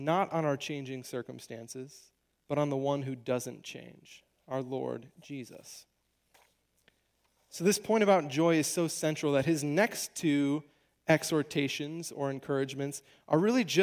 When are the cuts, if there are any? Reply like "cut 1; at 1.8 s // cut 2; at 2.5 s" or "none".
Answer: none